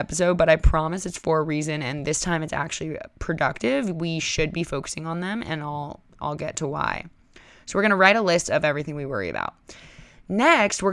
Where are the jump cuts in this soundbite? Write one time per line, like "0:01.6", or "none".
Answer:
none